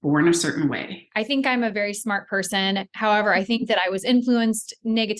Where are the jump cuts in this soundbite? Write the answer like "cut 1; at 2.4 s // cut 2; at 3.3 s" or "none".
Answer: cut 1; at 1.1 s